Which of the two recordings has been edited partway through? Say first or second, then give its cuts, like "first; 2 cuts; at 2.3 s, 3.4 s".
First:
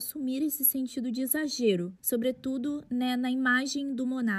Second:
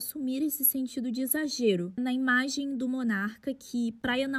second; 1 cut; at 2.0 s